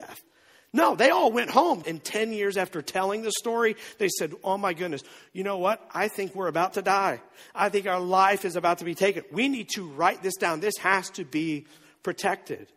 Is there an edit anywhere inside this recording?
yes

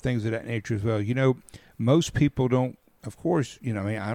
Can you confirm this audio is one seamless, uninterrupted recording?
yes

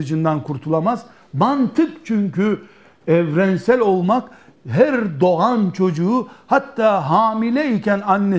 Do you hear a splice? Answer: no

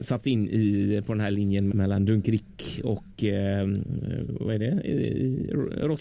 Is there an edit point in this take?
yes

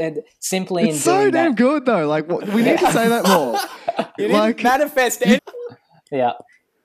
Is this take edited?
yes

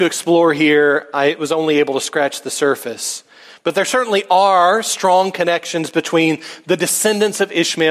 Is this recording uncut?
yes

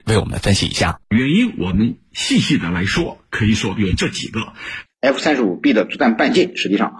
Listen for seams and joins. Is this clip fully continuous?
no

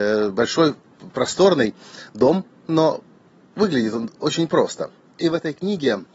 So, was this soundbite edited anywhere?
yes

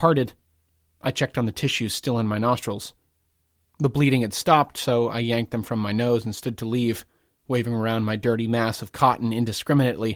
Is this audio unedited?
yes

